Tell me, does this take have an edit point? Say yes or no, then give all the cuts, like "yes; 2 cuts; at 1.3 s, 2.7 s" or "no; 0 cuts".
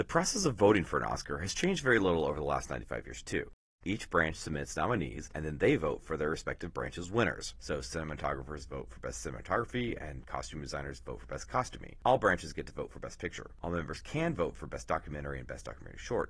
yes; 1 cut; at 3.8 s